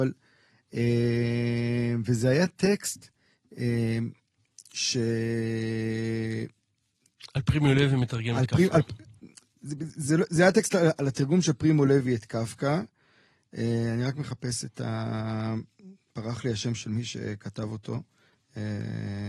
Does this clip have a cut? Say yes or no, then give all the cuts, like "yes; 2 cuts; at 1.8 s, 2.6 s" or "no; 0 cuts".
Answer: no; 0 cuts